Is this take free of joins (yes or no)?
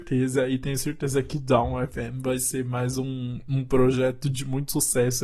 yes